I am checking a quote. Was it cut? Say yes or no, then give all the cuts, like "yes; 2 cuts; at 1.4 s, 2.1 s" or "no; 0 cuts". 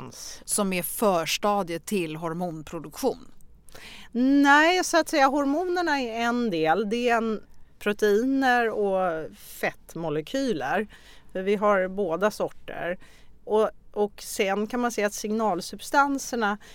yes; 1 cut; at 7.6 s